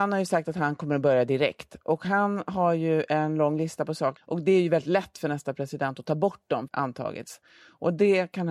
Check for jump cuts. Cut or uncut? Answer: cut